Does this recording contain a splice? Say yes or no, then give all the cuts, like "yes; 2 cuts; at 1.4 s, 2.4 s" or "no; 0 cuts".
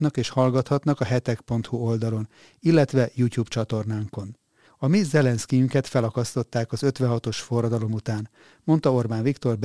yes; 1 cut; at 4.7 s